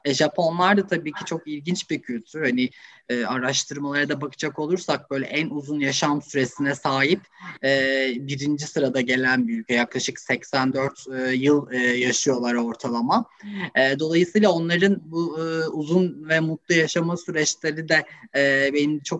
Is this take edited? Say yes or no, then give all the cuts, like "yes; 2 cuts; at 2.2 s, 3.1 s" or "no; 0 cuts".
no; 0 cuts